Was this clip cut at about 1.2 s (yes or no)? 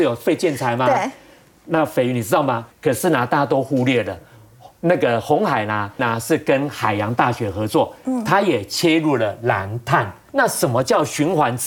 no